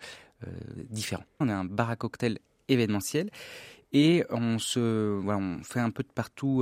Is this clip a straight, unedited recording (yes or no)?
no